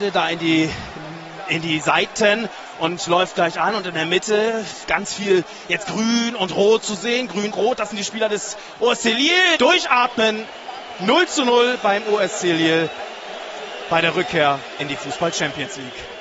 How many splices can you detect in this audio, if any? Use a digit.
3